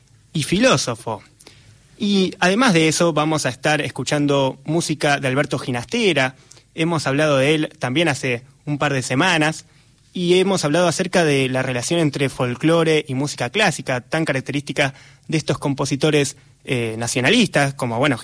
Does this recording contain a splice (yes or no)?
no